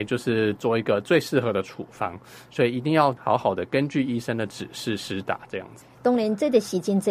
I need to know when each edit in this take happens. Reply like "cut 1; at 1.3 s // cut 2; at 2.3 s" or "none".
cut 1; at 5.9 s